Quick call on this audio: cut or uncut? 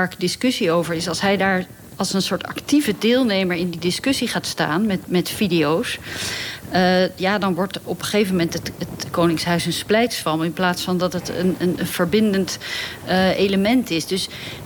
uncut